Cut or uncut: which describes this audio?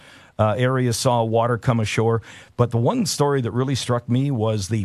uncut